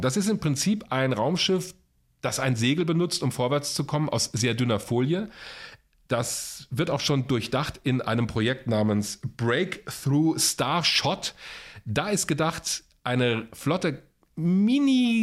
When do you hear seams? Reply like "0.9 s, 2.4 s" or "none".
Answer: none